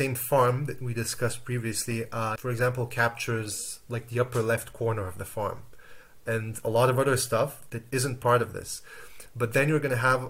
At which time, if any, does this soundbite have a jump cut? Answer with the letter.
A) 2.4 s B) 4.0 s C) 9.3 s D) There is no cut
A